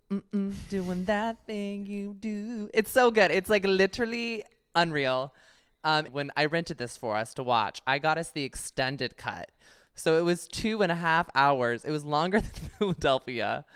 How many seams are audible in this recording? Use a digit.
1